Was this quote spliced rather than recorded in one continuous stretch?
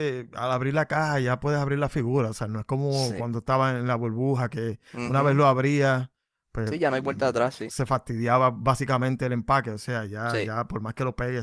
no; 0 cuts

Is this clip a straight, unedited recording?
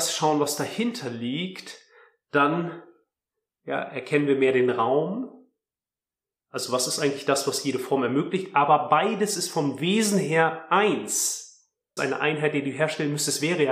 no; 1 cut; at 12.0 s

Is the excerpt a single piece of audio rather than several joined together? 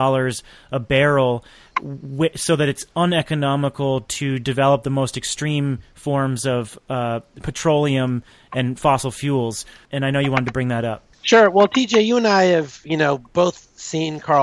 yes; 0 cuts

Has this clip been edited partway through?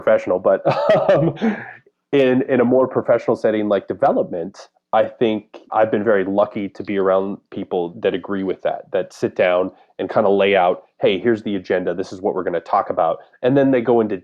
no; 0 cuts

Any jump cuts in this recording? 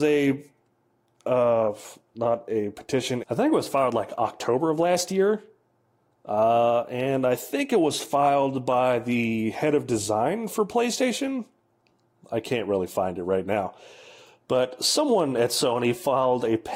yes; 1 cut; at 3.2 s

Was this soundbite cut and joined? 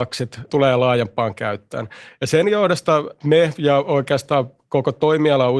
yes; 1 cut; at 2.2 s

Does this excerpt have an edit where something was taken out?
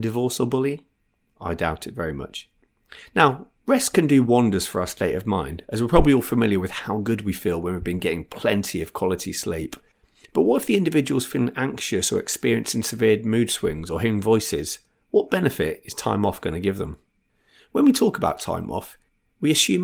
no; 0 cuts

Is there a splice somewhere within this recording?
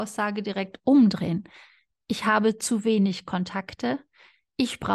no; 0 cuts

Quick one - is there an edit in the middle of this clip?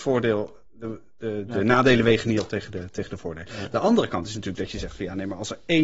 no; 0 cuts

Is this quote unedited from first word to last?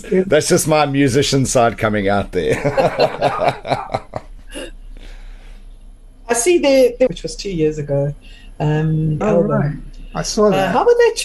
no; 2 cuts; at 7.1 s, 9.2 s

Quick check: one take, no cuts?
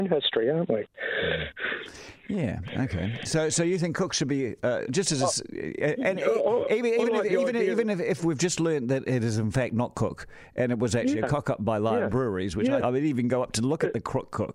no; 2 cuts; at 4.9 s, 12.8 s

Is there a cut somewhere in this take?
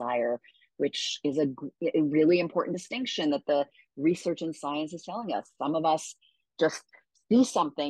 no; 0 cuts

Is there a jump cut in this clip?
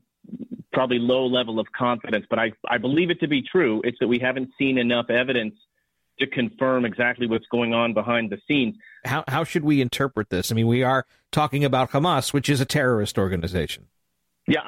yes; 2 cuts; at 4.0 s, 9.0 s

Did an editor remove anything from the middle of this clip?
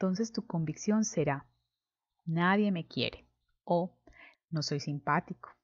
yes; 1 cut; at 4.3 s

